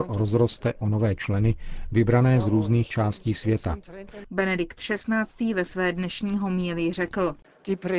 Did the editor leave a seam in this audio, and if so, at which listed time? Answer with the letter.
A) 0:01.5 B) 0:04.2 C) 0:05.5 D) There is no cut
B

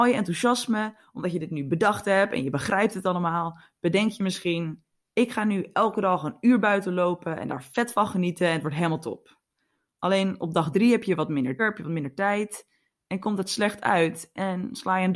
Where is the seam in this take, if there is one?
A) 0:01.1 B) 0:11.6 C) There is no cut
B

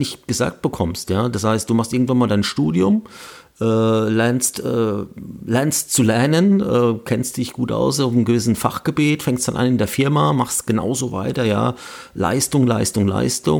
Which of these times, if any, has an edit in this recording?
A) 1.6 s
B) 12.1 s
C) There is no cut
C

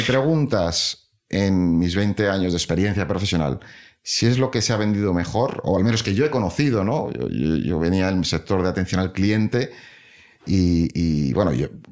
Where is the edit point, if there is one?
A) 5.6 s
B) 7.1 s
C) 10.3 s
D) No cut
D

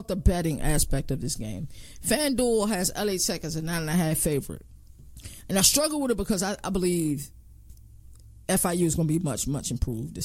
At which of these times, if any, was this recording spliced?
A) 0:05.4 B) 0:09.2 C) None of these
C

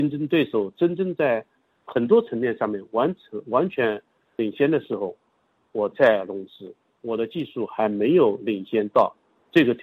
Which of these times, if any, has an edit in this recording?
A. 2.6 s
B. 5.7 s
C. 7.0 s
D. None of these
C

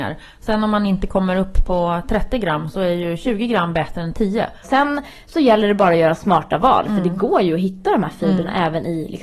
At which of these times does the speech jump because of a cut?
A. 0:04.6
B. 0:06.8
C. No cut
A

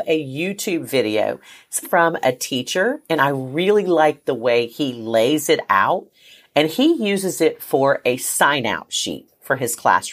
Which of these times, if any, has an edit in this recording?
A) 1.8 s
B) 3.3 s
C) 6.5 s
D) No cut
A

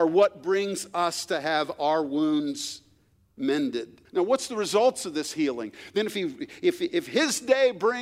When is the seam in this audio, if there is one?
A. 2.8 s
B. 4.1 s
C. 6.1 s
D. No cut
B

